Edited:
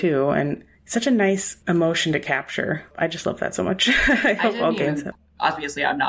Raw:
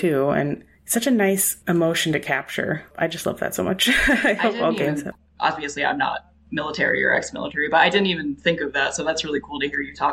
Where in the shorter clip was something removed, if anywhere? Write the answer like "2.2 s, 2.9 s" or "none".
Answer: none